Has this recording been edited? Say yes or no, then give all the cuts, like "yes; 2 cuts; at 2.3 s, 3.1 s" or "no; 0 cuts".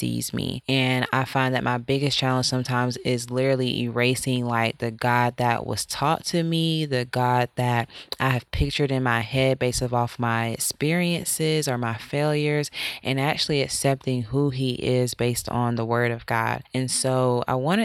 no; 0 cuts